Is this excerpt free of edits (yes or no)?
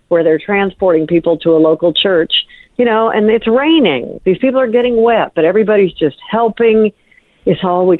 yes